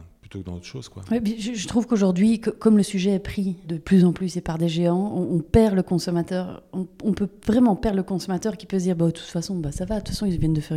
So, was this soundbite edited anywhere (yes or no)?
yes